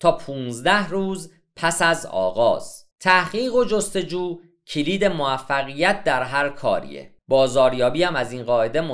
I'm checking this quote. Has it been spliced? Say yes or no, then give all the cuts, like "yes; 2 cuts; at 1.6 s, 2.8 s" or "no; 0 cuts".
yes; 2 cuts; at 2.9 s, 7.2 s